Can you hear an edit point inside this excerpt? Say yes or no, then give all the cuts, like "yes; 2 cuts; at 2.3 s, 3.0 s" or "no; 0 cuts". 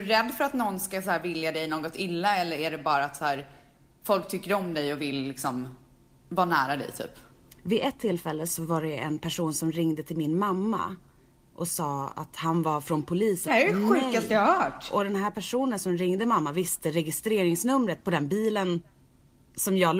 yes; 1 cut; at 13.5 s